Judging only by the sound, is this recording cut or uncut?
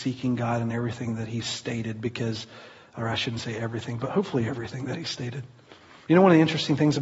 cut